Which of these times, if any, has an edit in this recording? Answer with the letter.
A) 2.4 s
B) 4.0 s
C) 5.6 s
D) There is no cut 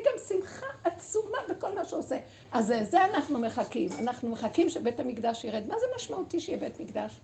A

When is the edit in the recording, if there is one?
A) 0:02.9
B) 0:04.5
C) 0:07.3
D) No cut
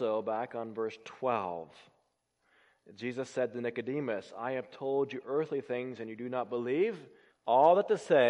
C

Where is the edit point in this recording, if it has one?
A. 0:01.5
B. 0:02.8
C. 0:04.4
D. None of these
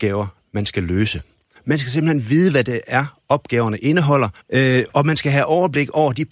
C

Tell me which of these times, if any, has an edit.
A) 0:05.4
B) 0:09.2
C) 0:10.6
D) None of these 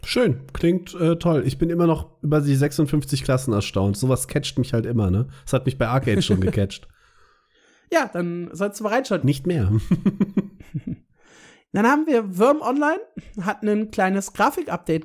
B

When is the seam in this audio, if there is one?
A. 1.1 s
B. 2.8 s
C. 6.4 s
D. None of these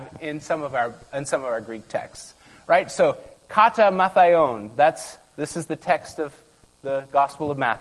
D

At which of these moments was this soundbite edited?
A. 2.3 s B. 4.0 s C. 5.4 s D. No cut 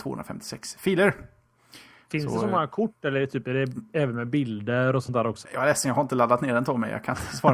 C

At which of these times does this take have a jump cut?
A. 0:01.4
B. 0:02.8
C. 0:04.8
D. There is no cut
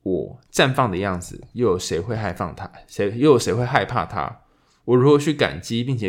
D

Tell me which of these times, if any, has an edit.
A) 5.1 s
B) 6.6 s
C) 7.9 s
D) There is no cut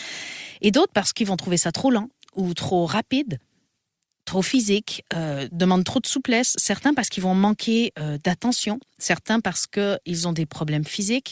D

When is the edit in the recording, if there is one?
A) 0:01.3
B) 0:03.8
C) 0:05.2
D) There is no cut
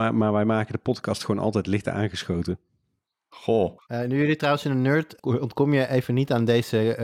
C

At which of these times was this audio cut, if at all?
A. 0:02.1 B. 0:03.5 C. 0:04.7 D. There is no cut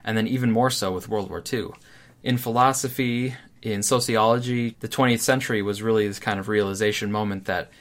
C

